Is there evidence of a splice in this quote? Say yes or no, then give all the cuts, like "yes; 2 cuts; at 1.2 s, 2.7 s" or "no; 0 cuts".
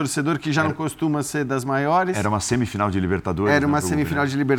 no; 0 cuts